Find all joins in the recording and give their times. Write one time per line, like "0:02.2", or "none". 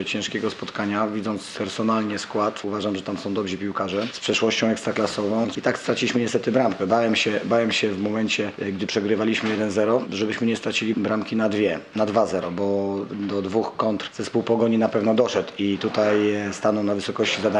0:05.5